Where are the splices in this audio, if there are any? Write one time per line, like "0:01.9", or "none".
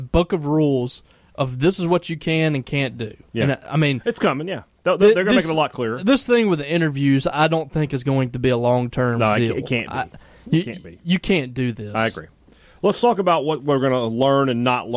none